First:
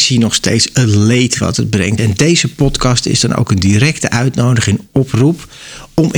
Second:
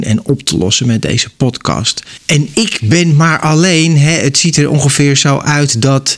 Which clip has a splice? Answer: first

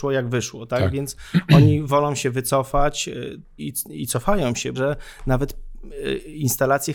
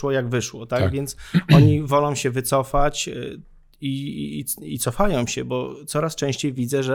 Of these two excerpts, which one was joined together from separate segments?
first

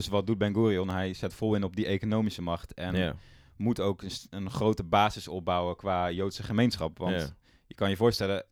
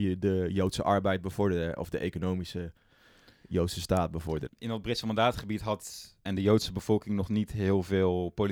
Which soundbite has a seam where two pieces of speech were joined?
second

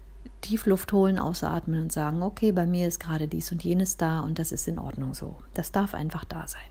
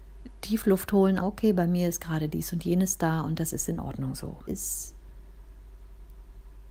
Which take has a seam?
second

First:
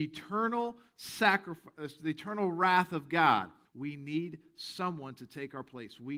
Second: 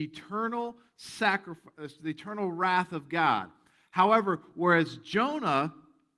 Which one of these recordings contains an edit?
first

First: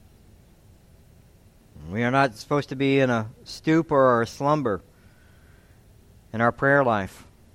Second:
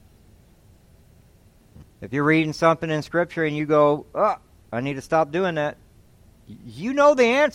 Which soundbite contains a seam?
second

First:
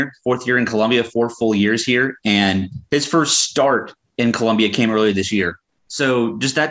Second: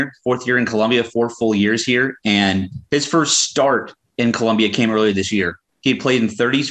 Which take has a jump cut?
first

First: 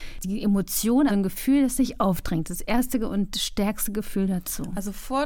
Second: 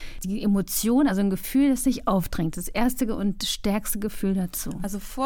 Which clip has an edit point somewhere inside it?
first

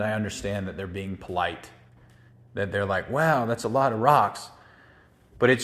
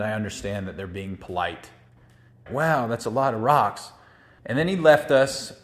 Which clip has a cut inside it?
second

